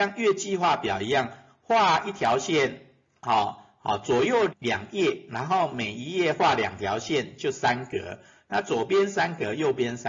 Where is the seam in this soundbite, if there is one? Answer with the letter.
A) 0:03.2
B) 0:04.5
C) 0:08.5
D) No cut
B